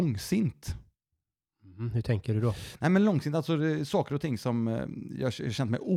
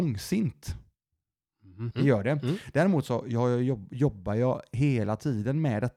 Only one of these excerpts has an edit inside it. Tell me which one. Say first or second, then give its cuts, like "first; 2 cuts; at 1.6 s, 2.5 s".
second; 1 cut; at 1.9 s